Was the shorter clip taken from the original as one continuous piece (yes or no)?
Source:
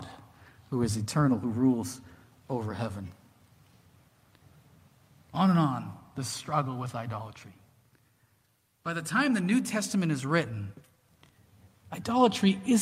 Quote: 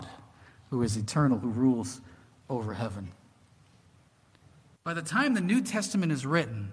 no